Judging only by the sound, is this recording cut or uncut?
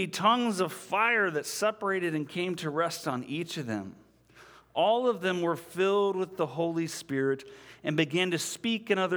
uncut